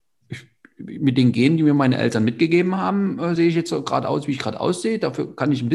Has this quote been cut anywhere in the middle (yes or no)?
no